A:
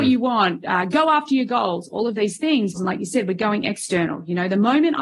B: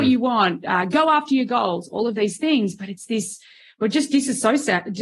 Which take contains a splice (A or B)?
A